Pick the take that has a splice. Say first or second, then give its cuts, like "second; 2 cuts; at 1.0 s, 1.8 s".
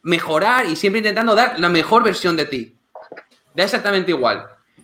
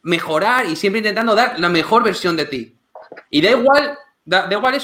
first; 1 cut; at 3.3 s